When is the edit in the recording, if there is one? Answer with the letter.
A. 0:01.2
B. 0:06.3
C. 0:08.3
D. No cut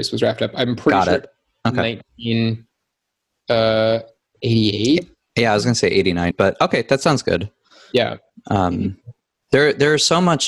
B